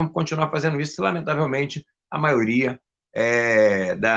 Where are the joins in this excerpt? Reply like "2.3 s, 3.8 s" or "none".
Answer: none